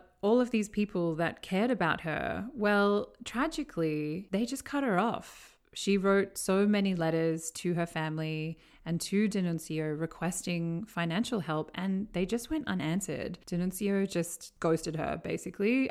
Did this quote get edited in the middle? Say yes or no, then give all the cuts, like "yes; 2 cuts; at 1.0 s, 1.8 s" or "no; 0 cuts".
no; 0 cuts